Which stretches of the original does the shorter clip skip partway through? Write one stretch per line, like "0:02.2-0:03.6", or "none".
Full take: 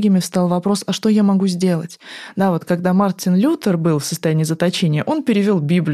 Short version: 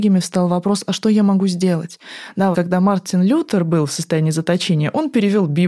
0:02.5-0:02.6